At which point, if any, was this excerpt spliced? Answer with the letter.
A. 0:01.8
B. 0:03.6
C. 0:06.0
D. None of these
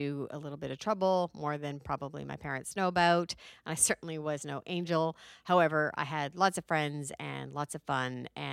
D